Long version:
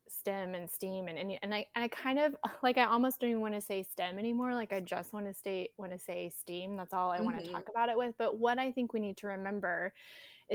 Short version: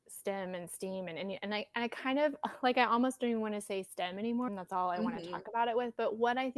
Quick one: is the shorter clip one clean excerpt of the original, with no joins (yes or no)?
no